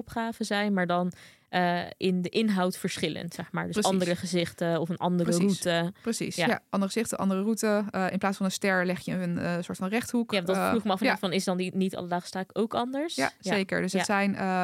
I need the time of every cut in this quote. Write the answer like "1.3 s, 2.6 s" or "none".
none